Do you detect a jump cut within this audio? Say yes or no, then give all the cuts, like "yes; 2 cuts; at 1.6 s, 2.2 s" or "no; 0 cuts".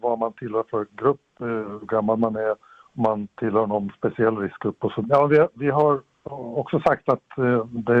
yes; 1 cut; at 5.0 s